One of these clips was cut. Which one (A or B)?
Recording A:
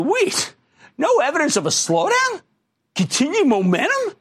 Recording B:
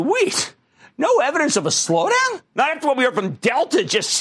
B